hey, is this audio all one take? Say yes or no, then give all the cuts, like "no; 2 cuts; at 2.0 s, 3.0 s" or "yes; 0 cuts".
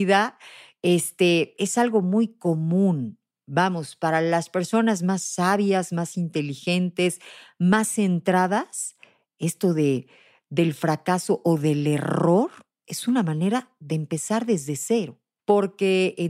no; 1 cut; at 15.4 s